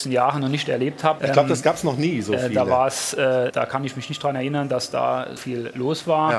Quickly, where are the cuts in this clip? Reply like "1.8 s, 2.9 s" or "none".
1.2 s, 3.5 s, 5.4 s